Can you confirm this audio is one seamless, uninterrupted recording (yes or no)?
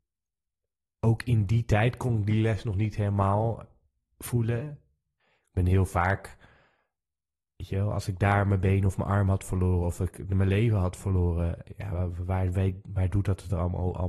no